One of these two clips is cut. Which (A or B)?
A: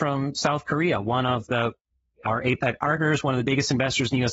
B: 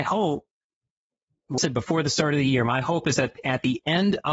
B